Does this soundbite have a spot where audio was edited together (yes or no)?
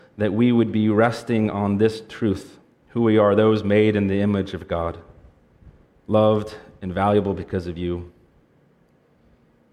yes